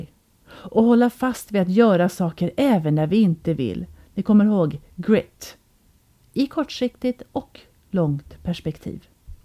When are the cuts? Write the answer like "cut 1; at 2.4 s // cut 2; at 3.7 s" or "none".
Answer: none